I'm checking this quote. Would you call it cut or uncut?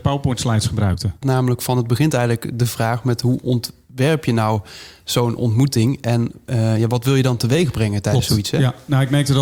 cut